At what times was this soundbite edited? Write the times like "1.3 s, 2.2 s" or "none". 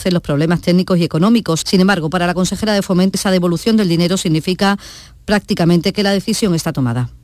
1.6 s, 3.1 s